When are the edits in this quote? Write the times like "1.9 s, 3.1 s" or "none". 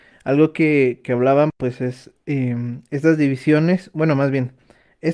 none

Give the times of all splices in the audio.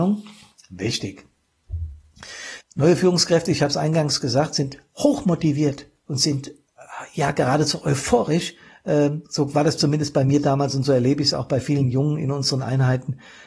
2.6 s

